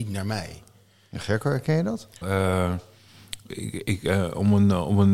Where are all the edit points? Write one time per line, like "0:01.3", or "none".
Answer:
0:02.2
0:03.5